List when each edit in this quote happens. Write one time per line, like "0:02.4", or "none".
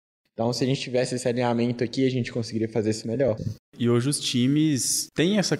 0:03.4